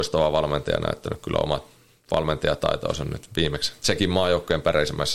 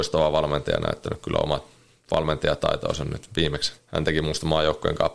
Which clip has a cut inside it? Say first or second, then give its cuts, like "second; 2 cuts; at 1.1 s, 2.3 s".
second; 1 cut; at 3.8 s